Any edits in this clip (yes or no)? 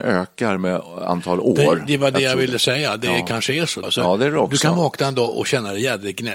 yes